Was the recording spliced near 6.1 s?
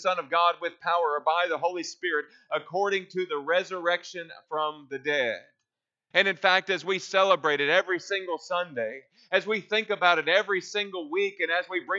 yes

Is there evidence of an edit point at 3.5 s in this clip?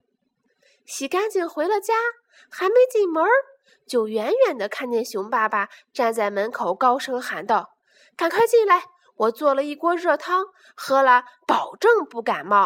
no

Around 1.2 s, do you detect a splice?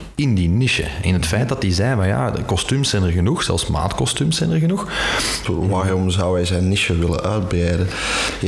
no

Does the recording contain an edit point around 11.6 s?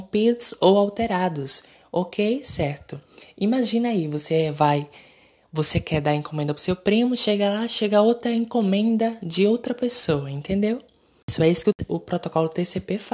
no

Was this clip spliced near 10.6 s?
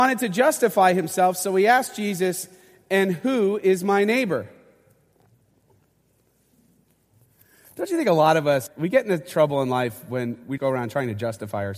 yes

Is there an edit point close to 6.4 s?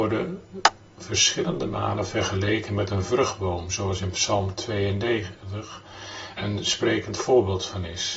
yes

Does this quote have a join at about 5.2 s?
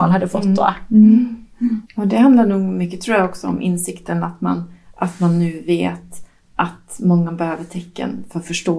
no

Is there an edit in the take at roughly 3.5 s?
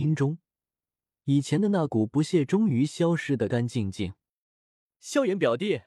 yes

